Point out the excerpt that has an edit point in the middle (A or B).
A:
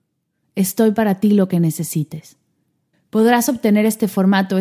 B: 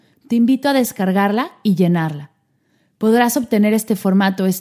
A